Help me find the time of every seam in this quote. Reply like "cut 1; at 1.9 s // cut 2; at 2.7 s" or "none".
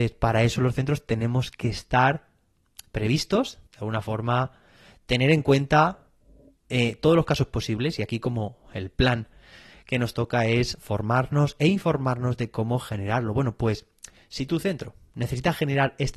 cut 1; at 3.7 s